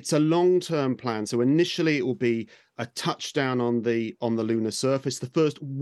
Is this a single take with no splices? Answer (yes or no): yes